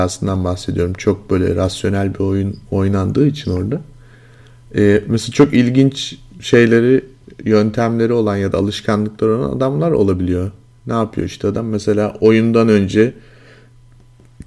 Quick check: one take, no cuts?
yes; 0 cuts

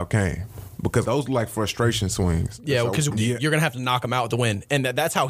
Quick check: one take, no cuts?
no; 2 cuts; at 1.0 s, 3.1 s

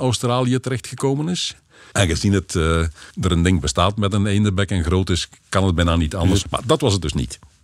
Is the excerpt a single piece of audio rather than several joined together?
no; 3 cuts; at 1.9 s, 3.1 s, 6.4 s

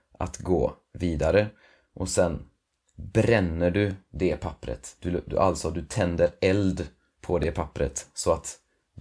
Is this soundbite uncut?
yes; 0 cuts

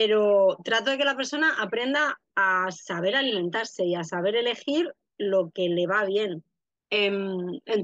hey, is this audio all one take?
no; 1 cut; at 6.8 s

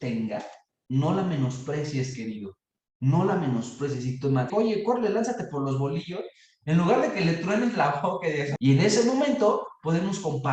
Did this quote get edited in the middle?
yes; 2 cuts; at 4.5 s, 8.6 s

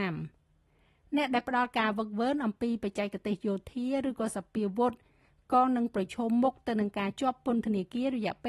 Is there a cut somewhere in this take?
no; 0 cuts

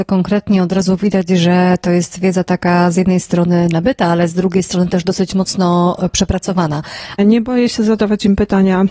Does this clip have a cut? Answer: yes; 1 cut; at 7.2 s

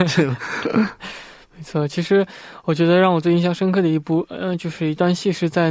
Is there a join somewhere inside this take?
no; 0 cuts

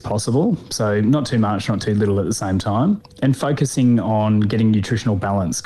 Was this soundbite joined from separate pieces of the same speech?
no; 0 cuts

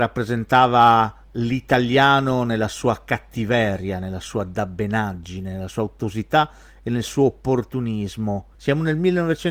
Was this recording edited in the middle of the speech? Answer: yes; 1 cut; at 8.5 s

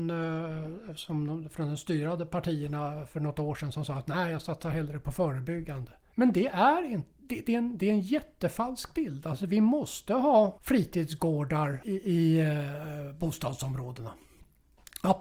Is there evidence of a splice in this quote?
no; 0 cuts

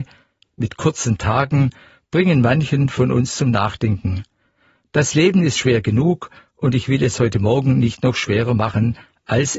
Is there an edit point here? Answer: yes; 1 cut; at 5.6 s

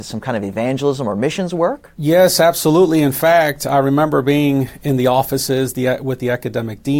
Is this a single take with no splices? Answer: yes; 0 cuts

